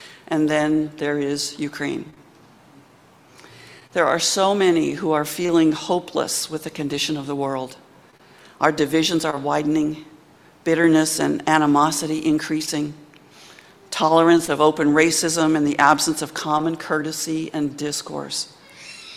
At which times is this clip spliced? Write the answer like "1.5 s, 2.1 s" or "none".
none